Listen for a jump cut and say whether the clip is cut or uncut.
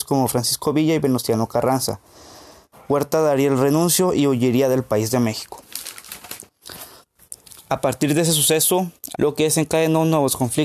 cut